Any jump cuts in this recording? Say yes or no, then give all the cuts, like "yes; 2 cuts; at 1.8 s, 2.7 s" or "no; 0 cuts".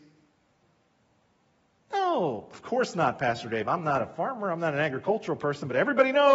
no; 0 cuts